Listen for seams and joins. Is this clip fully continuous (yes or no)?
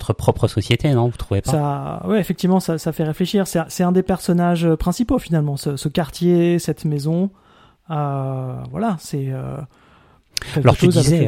yes